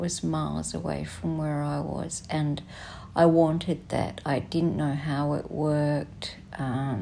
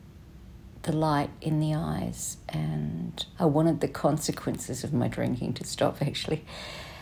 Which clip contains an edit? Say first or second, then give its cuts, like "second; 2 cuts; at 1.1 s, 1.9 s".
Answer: second; 1 cut; at 3.3 s